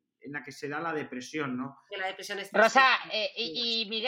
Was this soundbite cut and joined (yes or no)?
yes